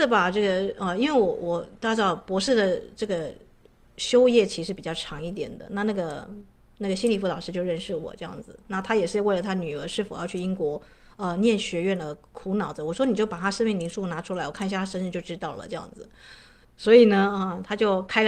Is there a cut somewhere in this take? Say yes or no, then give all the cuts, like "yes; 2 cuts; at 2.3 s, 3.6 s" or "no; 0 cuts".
yes; 1 cut; at 16.6 s